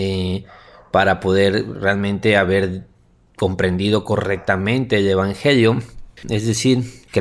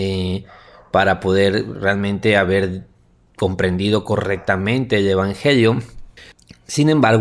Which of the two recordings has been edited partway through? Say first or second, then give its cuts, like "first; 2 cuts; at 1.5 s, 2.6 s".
first; 1 cut; at 6.2 s